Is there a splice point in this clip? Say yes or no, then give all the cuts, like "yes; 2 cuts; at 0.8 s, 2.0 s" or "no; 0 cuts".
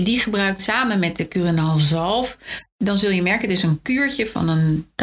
no; 0 cuts